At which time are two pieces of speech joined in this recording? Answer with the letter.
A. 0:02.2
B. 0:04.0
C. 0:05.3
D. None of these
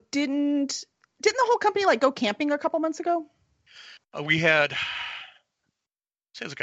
B